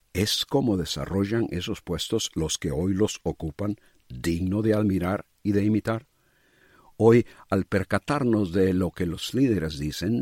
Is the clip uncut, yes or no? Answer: yes